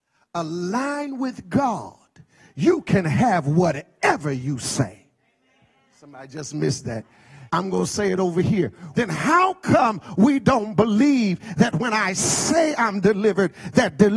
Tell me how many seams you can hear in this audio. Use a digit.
2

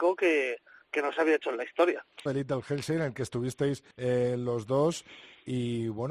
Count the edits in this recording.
2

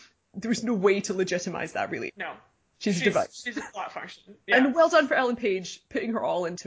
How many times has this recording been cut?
1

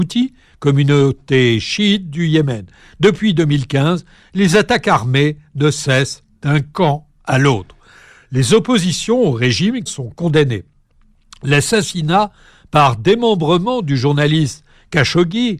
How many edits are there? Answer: 1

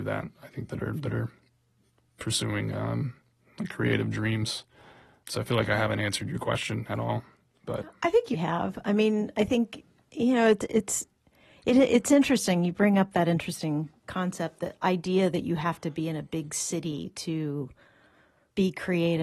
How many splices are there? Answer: 1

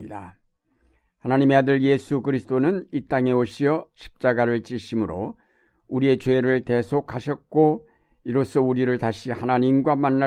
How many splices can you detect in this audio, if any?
0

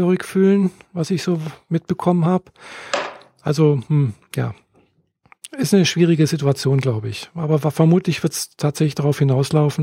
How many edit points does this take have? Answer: 0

